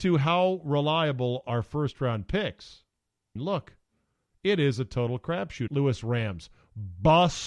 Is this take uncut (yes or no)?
no